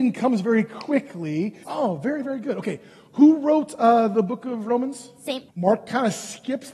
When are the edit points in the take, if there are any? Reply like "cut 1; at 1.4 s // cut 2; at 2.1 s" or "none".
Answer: cut 1; at 1.6 s // cut 2; at 5.5 s